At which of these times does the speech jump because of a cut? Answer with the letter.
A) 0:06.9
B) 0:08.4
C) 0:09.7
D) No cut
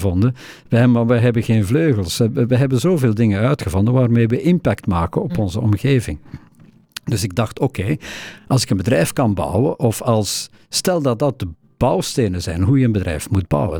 D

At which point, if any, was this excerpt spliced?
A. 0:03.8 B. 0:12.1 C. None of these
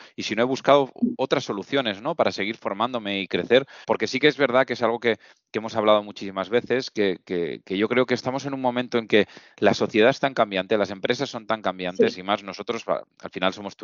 A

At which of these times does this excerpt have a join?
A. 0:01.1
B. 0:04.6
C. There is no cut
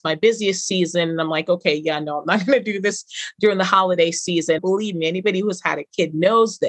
B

